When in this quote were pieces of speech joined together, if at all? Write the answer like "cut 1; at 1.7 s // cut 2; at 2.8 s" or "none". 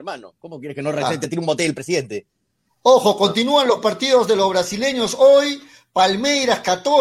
none